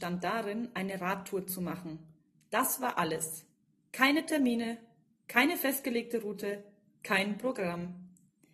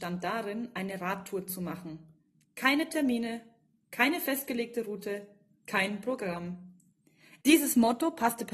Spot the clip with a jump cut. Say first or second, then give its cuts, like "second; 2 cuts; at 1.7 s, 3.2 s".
second; 2 cuts; at 2.4 s, 7.4 s